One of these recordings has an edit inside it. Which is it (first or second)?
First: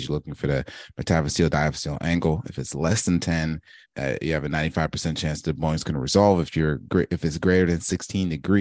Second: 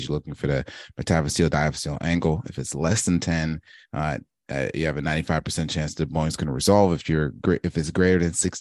first